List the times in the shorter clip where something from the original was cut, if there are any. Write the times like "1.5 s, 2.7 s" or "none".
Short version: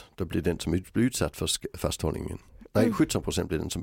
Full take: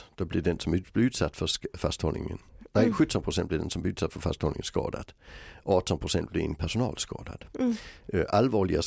none